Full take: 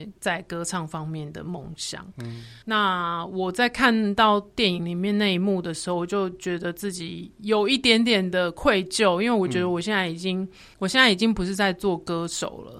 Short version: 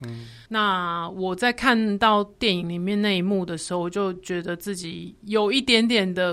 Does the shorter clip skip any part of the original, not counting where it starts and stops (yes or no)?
no